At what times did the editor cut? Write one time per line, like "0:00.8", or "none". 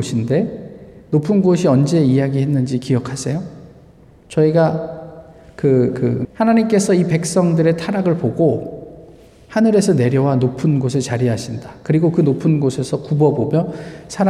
0:06.2